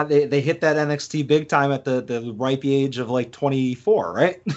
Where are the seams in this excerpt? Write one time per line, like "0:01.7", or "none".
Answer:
none